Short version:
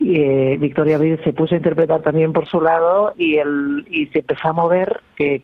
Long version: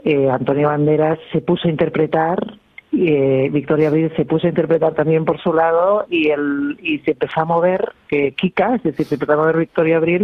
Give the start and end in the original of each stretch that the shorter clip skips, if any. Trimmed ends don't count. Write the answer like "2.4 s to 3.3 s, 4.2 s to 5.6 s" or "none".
none